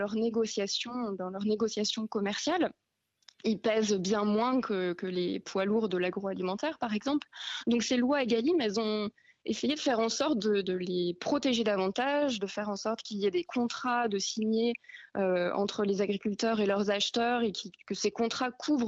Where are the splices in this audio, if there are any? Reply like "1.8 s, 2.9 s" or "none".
none